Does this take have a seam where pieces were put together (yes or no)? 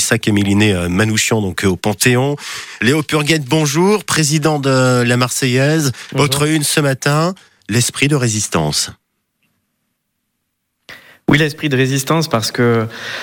no